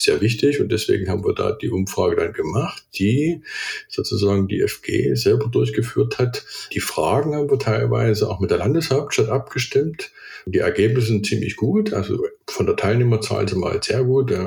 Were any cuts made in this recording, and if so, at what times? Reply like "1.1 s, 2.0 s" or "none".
12.4 s